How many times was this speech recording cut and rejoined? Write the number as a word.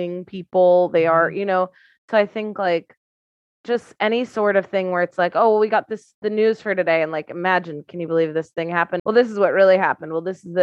one